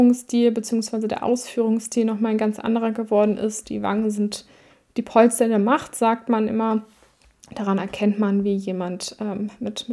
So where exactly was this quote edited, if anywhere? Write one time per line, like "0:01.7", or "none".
none